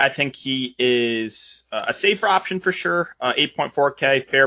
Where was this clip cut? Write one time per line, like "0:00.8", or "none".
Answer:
none